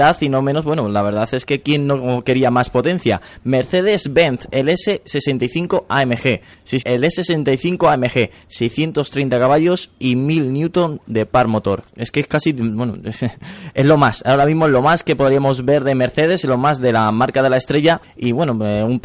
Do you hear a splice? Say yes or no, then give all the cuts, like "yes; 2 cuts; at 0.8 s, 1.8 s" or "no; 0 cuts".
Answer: yes; 2 cuts; at 6.8 s, 11.9 s